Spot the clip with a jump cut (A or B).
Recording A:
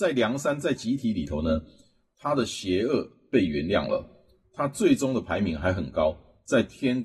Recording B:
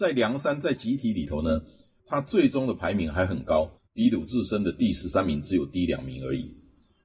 B